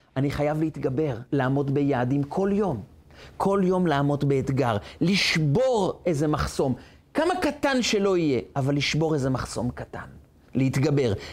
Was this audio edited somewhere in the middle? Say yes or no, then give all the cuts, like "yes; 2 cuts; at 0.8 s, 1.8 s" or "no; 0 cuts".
no; 0 cuts